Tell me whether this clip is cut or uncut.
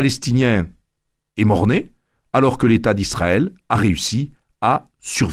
uncut